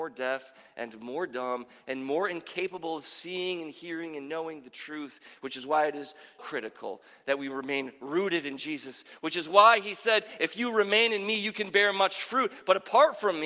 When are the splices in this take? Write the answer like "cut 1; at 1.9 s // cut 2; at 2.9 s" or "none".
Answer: cut 1; at 6.4 s